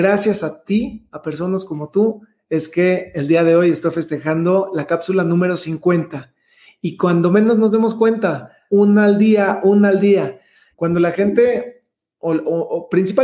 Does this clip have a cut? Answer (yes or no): yes